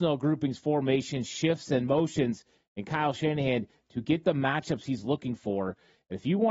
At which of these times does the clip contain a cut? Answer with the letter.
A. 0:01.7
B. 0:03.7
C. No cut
C